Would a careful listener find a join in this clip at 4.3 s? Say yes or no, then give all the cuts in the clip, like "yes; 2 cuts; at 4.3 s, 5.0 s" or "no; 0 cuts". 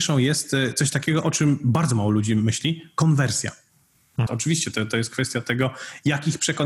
yes; 1 cut; at 4.3 s